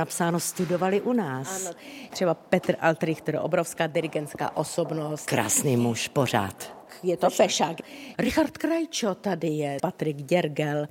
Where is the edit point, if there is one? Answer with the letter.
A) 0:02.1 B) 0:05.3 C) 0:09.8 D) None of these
C